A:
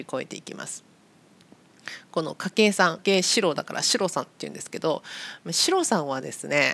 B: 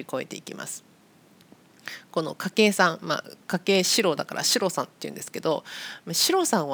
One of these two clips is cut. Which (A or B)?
A